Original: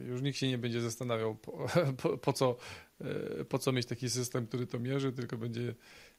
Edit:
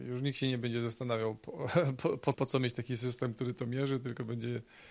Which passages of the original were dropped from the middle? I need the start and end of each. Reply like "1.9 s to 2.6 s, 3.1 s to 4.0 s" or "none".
2.3 s to 3.5 s